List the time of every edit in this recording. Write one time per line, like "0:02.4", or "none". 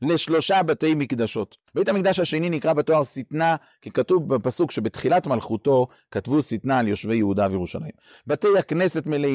0:01.7
0:08.1